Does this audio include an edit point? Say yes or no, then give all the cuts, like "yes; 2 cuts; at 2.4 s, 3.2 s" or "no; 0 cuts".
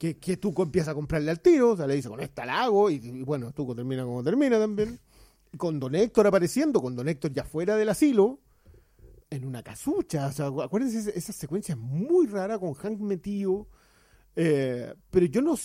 yes; 1 cut; at 9.2 s